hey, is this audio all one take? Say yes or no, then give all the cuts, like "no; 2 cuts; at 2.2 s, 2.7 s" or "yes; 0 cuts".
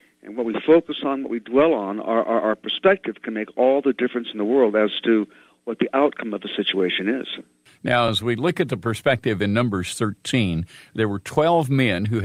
yes; 0 cuts